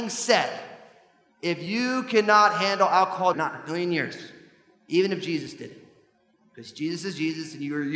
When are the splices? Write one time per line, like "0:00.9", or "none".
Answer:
0:03.3